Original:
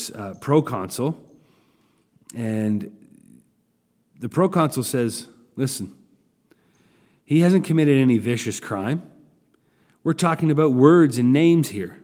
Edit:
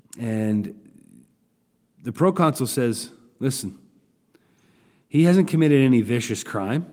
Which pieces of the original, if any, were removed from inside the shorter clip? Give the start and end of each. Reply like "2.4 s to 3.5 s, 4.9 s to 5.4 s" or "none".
none